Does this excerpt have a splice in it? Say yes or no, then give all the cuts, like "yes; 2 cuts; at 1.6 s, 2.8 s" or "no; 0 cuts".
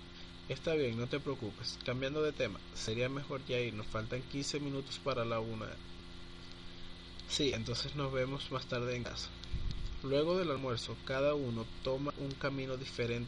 no; 0 cuts